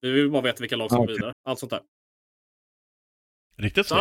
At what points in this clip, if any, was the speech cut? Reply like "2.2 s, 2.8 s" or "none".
1.3 s